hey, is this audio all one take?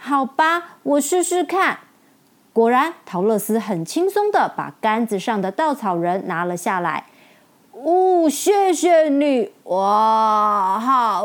yes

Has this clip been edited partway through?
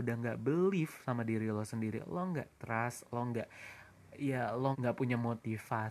yes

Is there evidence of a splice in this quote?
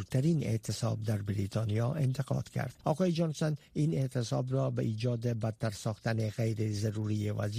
yes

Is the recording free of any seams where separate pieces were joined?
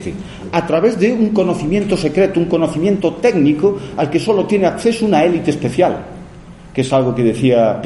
yes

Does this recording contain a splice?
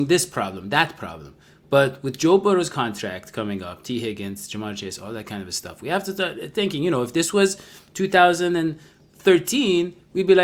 no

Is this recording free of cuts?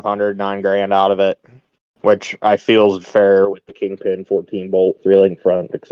no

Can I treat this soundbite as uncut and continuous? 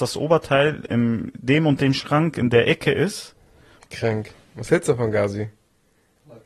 no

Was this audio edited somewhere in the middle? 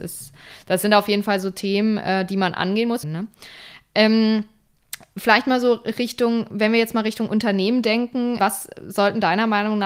yes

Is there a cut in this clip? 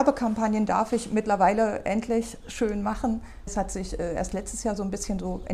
yes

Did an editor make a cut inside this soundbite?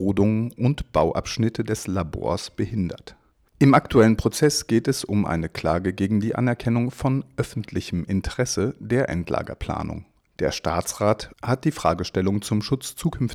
yes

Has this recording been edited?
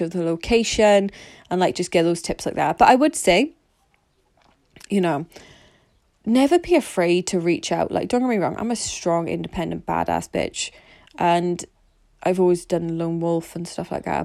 no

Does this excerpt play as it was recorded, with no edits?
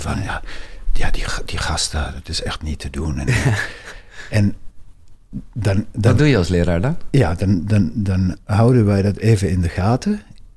yes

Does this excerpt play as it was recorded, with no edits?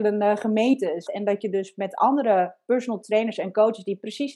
no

